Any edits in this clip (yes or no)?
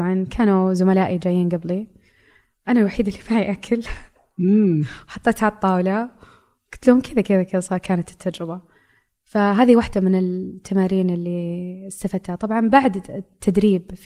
no